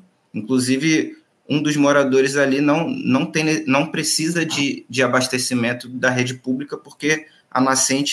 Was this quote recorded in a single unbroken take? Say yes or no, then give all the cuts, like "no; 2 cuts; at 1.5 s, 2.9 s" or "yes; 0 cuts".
yes; 0 cuts